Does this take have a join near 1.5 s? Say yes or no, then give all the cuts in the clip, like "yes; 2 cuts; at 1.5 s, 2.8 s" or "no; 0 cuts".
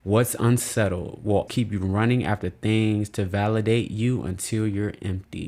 yes; 1 cut; at 1.5 s